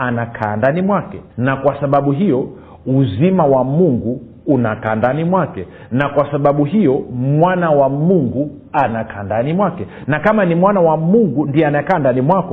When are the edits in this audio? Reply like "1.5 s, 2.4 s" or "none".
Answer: 1.3 s